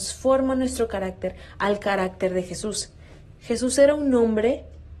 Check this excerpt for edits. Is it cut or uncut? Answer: uncut